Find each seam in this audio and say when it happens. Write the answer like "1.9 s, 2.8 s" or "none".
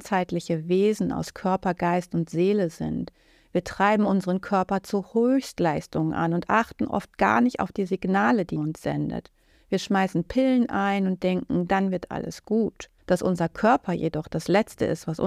8.6 s, 13.0 s